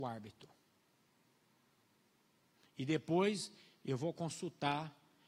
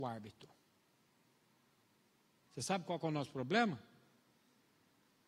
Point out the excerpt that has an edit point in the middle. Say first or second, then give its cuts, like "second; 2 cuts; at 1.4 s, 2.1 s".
second; 1 cut; at 2.5 s